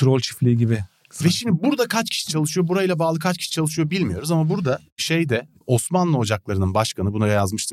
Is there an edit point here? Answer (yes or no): no